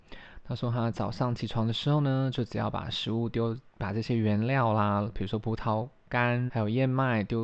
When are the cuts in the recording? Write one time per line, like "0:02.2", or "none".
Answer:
0:06.5